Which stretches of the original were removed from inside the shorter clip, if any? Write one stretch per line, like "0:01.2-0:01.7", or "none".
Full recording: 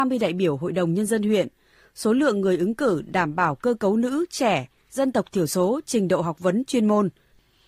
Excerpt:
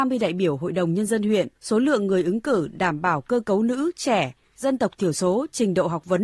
0:01.6-0:01.9